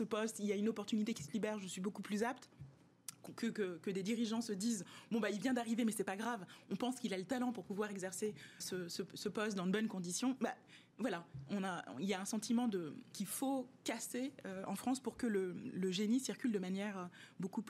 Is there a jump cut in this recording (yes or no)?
yes